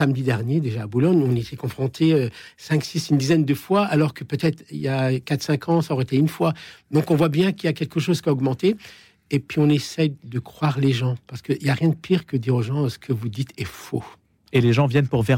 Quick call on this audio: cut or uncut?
uncut